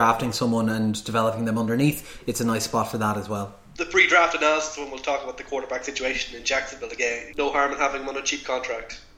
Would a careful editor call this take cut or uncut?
cut